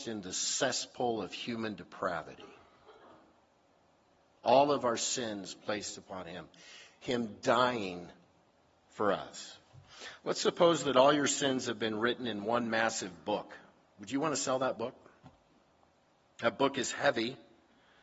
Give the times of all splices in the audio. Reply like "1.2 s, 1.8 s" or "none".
none